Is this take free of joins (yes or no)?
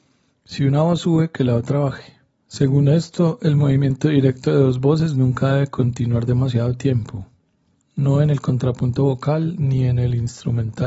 no